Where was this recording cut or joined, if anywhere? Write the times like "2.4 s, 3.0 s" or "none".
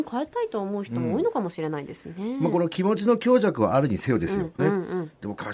4.6 s